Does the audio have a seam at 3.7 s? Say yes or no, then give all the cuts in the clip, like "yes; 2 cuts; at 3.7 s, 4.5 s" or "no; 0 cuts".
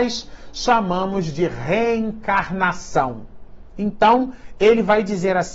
yes; 1 cut; at 3.7 s